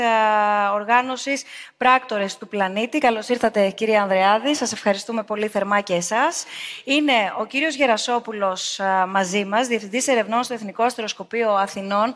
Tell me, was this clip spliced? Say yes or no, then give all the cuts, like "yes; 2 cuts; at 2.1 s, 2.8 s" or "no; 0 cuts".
no; 0 cuts